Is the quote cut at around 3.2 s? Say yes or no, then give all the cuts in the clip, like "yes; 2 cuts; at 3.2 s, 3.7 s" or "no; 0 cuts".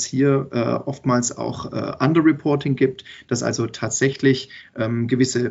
no; 0 cuts